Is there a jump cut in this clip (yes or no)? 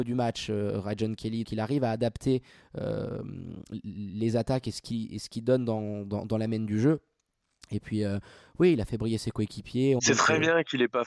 yes